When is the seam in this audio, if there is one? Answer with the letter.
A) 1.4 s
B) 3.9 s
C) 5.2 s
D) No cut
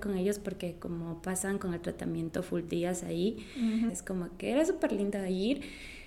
B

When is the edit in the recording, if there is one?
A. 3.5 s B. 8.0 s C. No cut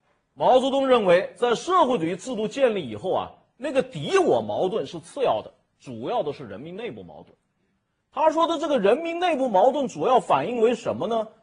B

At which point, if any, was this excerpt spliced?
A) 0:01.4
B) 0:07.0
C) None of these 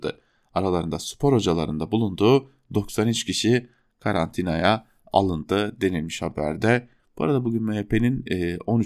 B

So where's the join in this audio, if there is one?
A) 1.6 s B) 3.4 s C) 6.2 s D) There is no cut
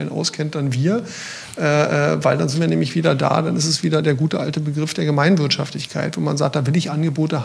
D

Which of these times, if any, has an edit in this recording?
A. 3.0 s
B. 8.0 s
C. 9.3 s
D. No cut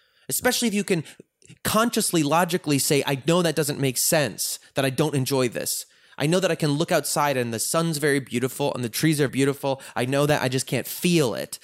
C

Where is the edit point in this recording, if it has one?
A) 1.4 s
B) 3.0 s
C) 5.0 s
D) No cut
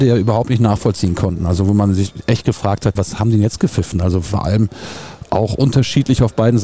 B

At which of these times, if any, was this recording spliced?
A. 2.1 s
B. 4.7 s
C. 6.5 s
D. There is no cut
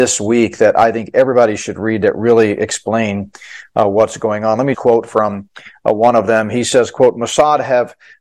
B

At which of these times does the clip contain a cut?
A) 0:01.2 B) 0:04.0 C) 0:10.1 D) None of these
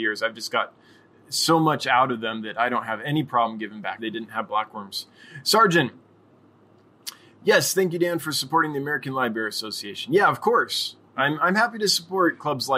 B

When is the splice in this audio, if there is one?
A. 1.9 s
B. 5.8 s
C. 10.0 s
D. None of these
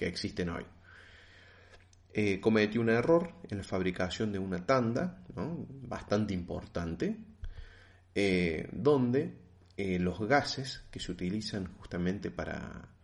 D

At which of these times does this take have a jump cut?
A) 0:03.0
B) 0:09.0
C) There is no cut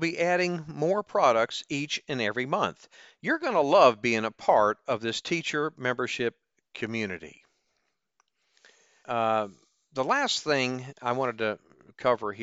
B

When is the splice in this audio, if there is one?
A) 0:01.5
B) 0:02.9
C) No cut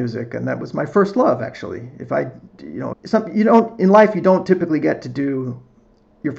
B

